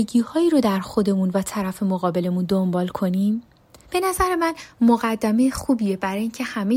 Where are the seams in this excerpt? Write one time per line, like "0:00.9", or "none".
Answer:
0:03.8